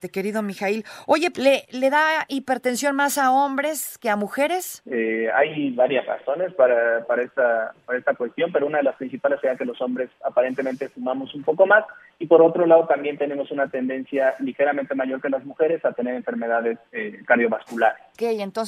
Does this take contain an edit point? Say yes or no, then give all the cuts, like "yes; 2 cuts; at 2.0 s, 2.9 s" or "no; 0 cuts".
yes; 2 cuts; at 1.3 s, 4.9 s